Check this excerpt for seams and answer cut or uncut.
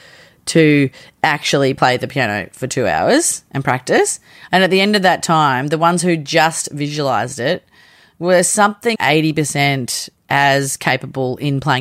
cut